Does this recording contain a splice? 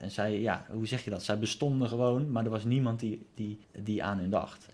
yes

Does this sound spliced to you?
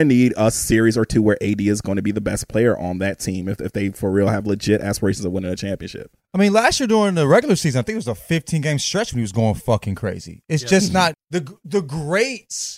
yes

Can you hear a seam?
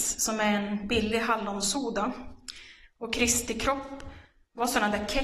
no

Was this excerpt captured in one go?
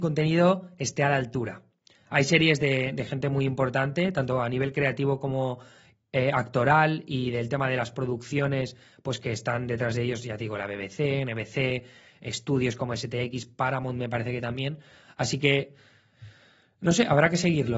yes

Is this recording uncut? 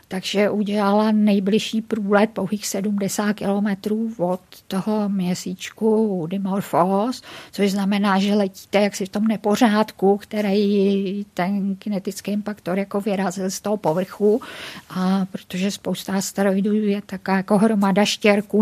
yes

